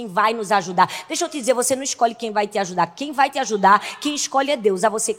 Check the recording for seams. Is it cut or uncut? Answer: uncut